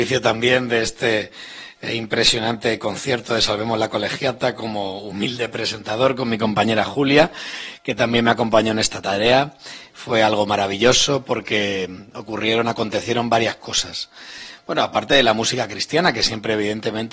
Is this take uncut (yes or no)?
yes